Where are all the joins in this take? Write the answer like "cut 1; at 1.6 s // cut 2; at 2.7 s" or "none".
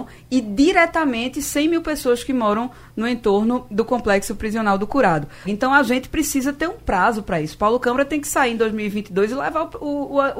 cut 1; at 5.4 s